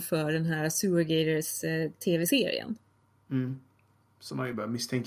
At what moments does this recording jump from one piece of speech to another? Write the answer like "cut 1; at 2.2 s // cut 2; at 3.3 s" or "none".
none